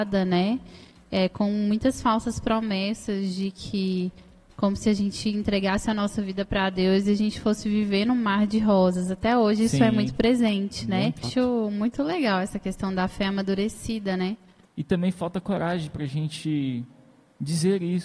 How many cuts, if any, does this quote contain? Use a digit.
2